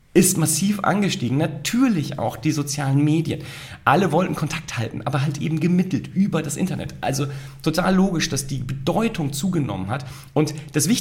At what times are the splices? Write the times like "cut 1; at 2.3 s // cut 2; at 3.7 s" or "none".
none